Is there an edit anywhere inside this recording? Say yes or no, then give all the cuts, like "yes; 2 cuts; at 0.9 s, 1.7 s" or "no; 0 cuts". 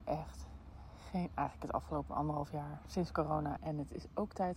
yes; 1 cut; at 3.6 s